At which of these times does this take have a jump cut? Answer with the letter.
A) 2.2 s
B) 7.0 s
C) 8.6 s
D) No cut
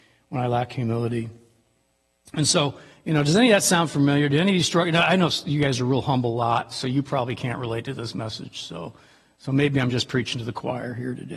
D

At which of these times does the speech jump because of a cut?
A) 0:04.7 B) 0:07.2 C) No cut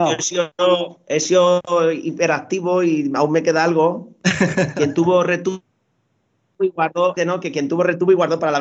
B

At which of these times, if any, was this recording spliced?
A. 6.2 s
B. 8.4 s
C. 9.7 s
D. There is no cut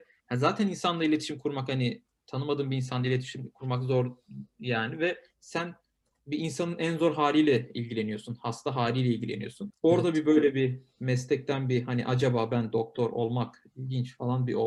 C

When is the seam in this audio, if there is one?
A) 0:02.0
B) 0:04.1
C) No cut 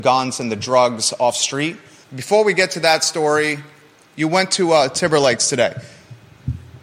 A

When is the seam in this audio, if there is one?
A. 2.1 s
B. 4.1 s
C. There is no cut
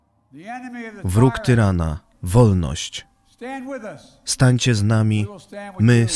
A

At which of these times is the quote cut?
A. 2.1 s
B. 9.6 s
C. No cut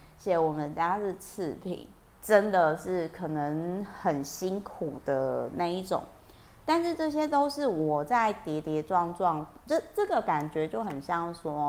A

